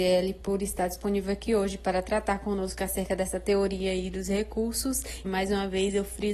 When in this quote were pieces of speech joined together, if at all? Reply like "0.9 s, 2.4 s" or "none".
5.2 s

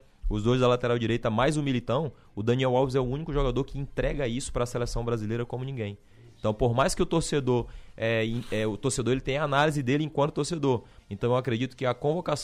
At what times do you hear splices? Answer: 11.0 s

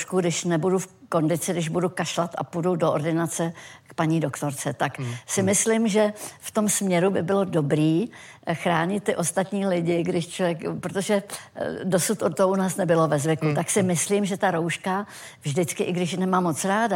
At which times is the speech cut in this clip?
none

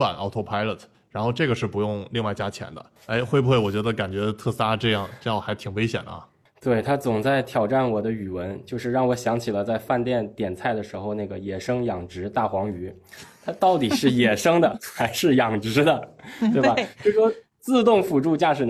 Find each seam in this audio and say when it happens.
3.0 s

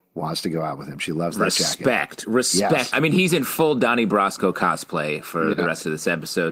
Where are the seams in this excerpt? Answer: 2.9 s

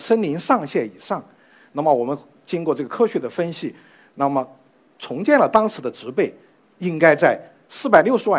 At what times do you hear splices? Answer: none

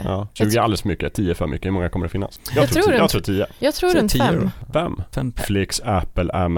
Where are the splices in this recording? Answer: 5.4 s

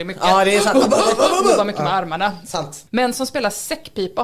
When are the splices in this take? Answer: 2.9 s

